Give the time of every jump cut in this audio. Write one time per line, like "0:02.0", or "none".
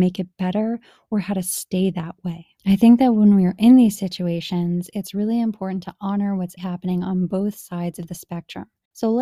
0:02.5
0:06.6